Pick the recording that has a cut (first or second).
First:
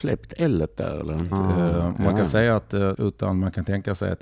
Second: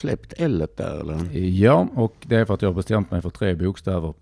first